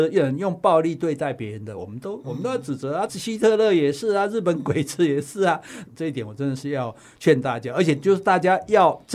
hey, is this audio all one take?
no; 2 cuts; at 3.1 s, 5.8 s

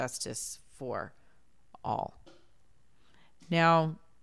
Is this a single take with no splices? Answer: yes; 0 cuts

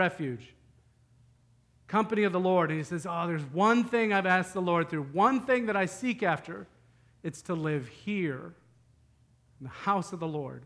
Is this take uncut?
yes; 0 cuts

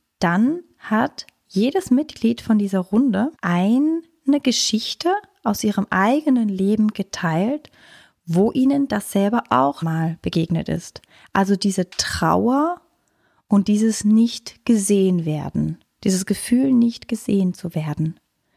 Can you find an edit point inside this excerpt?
yes; 2 cuts; at 3.3 s, 9.8 s

